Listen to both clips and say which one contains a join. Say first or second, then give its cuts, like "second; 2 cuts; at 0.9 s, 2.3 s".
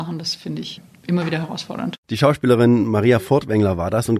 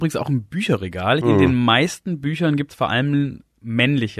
second; 1 cut; at 1.2 s